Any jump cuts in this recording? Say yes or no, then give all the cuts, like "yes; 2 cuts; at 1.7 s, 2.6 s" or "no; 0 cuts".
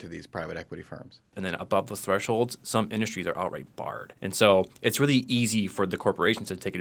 yes; 1 cut; at 1.3 s